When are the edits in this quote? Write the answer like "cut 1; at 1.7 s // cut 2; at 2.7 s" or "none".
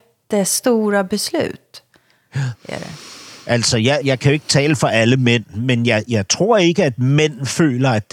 cut 1; at 4.0 s